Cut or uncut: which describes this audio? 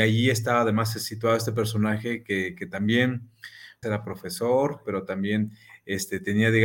cut